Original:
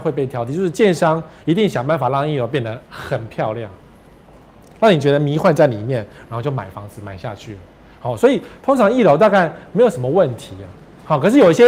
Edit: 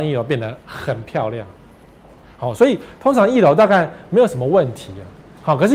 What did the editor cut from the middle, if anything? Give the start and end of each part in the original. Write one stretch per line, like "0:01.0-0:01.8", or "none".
0:04.5-0:07.8